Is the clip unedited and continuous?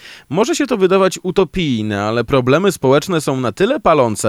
yes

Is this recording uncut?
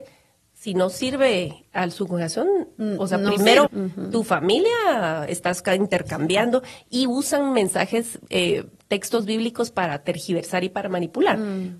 no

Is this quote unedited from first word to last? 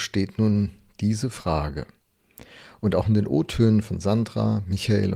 yes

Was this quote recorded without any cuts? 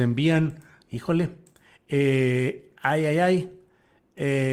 yes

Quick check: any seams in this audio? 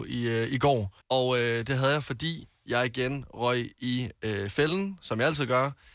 yes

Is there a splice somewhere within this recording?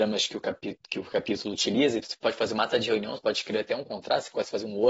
yes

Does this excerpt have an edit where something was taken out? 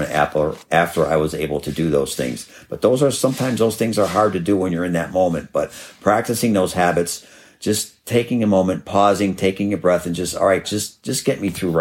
yes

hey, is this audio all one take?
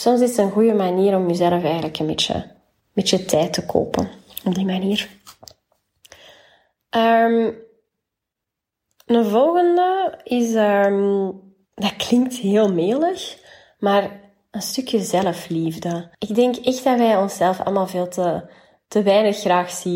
no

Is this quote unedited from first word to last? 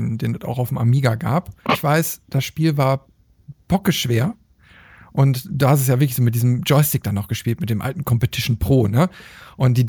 no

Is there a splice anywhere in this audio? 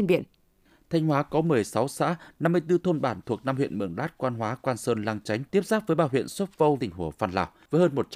yes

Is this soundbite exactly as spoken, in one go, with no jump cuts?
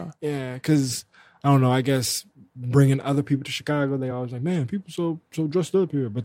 yes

